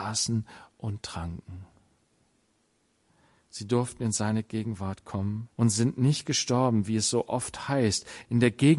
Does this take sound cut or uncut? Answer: cut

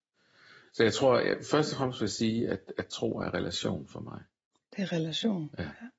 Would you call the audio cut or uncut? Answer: uncut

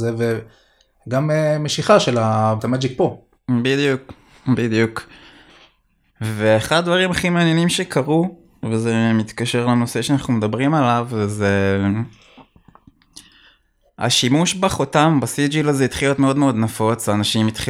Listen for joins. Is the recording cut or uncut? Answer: cut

